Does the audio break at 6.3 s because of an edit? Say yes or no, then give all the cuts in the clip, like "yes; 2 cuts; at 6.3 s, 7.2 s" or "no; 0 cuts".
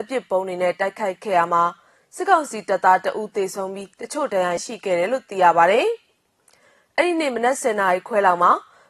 no; 1 cut; at 4.6 s